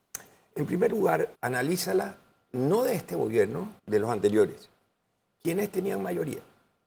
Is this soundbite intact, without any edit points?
no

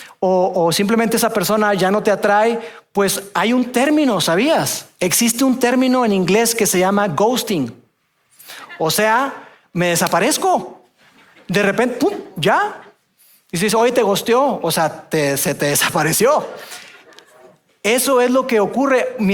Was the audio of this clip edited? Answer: no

